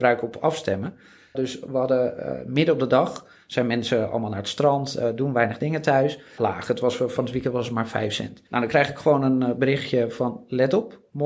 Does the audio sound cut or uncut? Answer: cut